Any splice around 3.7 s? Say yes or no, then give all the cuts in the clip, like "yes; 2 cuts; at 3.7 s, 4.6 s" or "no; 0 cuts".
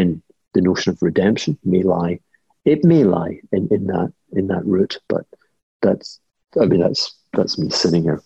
no; 0 cuts